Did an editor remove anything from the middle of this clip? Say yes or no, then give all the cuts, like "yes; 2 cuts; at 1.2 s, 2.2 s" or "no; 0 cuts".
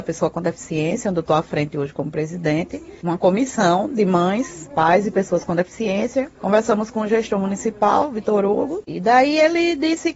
yes; 1 cut; at 8.8 s